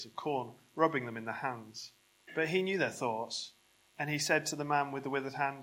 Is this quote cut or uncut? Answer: cut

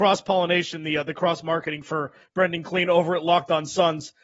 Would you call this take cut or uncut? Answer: uncut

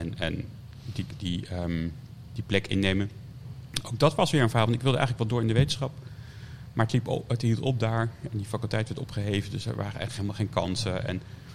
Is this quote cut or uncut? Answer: uncut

